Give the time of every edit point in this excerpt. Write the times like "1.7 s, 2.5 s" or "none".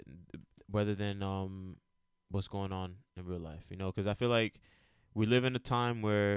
none